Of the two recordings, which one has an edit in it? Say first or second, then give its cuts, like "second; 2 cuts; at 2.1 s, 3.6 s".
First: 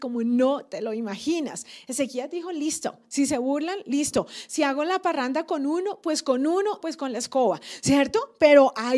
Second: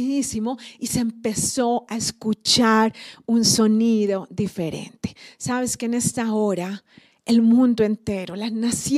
first; 1 cut; at 6.8 s